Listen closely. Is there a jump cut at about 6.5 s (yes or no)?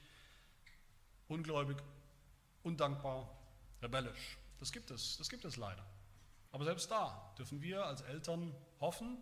yes